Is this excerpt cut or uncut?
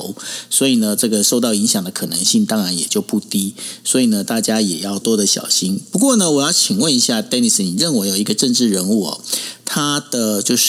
cut